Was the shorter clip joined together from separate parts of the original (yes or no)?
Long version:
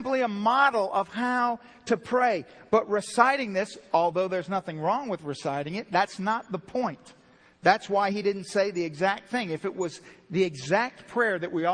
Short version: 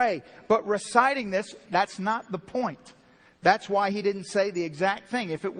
yes